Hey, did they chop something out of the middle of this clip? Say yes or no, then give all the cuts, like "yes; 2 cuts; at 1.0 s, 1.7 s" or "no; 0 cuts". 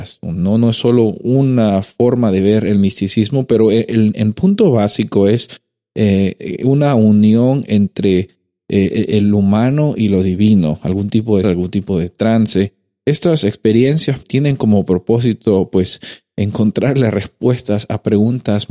yes; 2 cuts; at 11.4 s, 14.2 s